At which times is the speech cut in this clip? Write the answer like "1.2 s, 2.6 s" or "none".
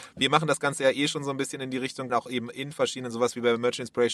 2.1 s